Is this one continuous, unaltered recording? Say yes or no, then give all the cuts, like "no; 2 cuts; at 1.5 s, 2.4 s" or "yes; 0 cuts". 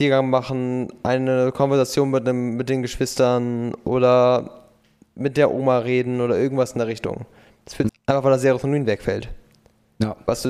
no; 1 cut; at 7.9 s